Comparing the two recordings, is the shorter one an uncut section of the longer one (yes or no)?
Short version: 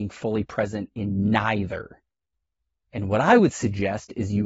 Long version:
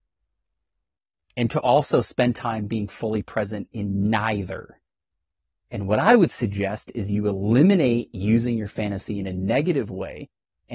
yes